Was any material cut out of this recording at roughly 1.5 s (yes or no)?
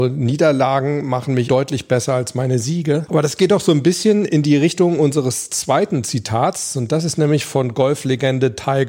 yes